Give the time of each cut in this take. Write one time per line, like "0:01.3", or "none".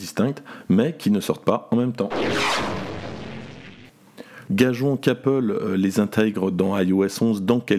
0:04.5